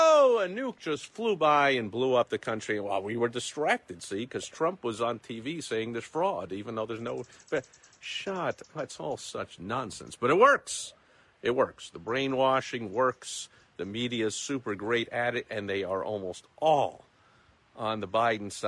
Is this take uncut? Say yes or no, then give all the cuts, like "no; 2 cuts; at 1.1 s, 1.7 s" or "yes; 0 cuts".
yes; 0 cuts